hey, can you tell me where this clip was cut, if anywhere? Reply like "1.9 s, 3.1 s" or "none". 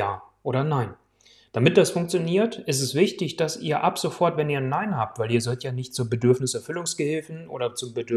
none